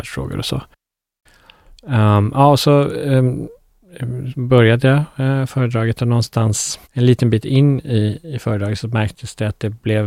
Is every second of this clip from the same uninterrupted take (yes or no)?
no